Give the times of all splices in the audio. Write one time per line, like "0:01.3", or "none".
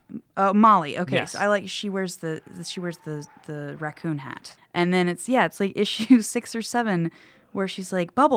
0:04.6